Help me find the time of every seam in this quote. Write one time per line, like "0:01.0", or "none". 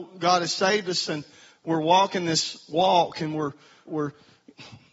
0:03.9